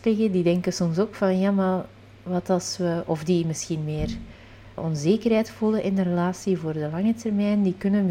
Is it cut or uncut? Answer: cut